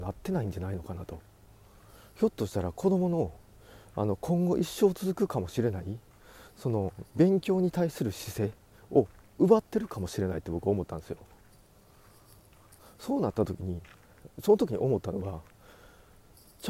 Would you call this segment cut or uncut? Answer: uncut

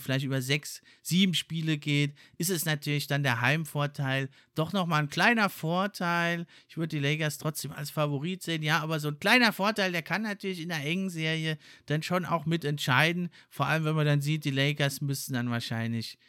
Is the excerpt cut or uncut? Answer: uncut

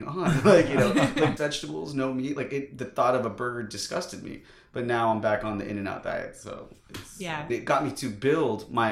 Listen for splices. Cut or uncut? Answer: cut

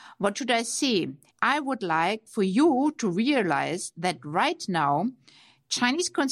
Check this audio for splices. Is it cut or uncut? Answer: cut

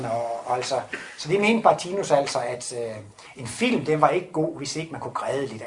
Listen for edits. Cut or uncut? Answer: uncut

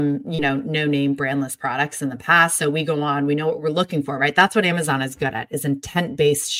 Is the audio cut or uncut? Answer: uncut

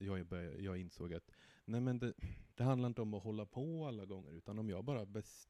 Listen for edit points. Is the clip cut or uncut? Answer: cut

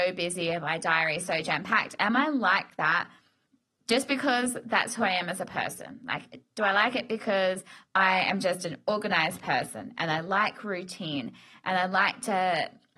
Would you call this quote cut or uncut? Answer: uncut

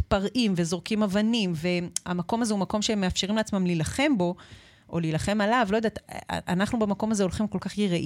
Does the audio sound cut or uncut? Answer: uncut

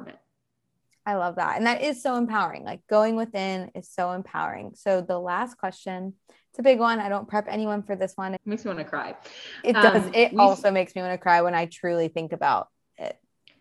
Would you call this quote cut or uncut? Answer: cut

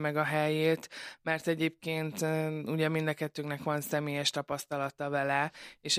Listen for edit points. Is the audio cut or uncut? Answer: uncut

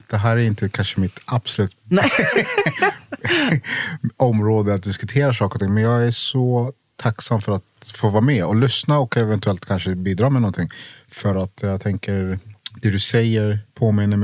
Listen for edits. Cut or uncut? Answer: uncut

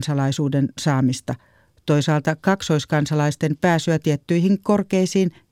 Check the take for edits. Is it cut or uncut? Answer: uncut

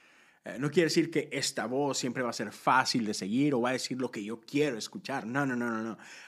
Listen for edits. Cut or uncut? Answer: uncut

